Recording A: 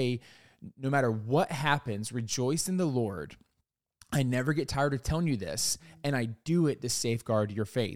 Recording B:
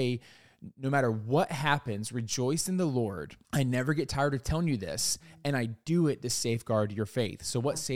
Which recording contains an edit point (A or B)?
B